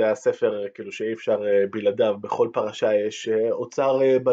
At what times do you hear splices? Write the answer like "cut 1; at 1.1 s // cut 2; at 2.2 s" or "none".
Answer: none